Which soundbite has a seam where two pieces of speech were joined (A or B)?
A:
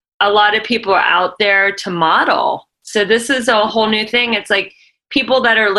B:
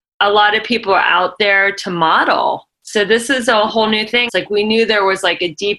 B